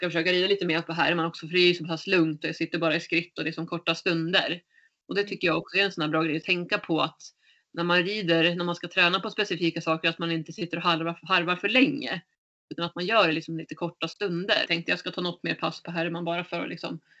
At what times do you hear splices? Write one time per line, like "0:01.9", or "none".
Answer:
0:14.7